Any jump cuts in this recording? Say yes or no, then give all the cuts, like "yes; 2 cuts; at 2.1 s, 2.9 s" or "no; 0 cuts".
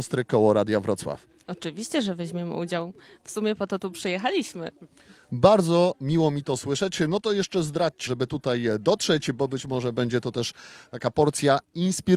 yes; 1 cut; at 8.1 s